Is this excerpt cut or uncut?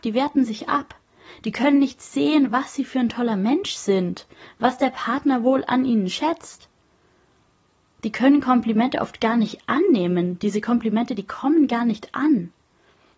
uncut